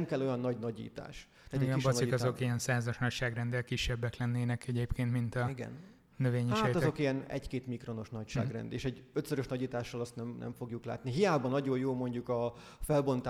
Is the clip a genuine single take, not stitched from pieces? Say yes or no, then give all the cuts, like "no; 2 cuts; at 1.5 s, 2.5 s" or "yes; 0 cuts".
yes; 0 cuts